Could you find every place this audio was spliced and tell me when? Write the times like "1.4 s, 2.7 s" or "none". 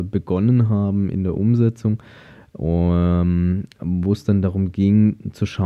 none